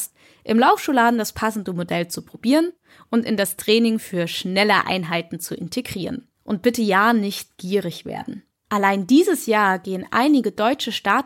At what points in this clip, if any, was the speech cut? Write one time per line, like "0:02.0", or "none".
0:06.3
0:08.6